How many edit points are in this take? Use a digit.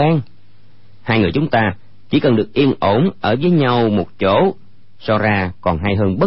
0